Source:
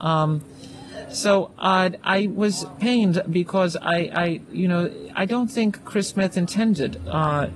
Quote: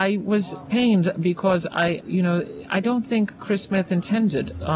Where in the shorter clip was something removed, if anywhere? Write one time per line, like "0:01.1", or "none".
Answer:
0:02.0